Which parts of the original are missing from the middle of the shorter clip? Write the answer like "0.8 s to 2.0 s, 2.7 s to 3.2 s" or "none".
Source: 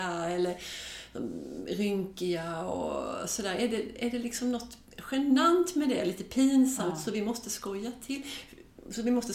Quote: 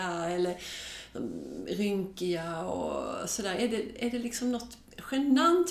none